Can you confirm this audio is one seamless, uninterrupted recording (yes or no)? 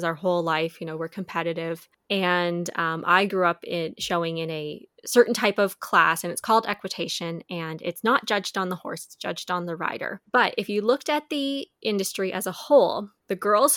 no